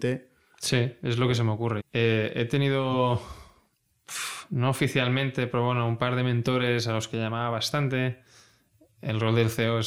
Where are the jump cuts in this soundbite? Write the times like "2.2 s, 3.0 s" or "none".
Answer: 1.8 s

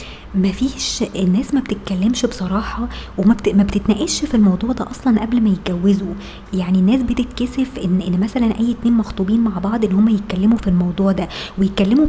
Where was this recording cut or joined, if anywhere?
none

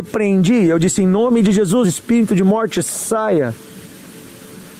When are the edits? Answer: none

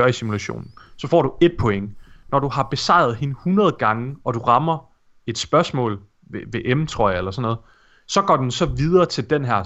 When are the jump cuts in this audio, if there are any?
none

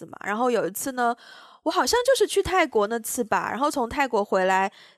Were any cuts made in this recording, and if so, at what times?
none

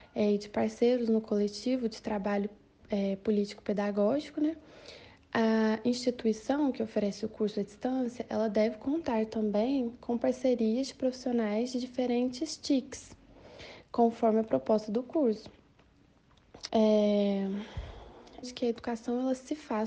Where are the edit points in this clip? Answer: 16.7 s, 18.4 s

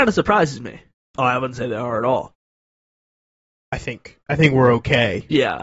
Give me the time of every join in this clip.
1.0 s

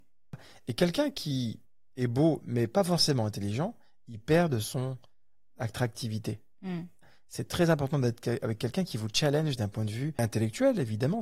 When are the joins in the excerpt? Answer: none

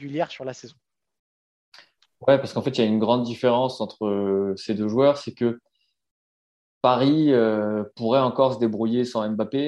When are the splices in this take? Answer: none

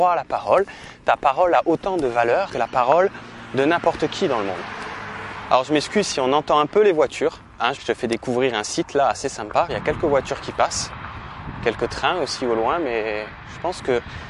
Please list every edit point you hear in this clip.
2.5 s, 7.7 s, 9.7 s

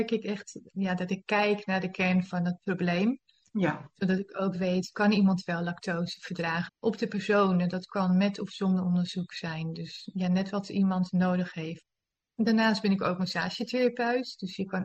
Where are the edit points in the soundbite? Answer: 6.7 s

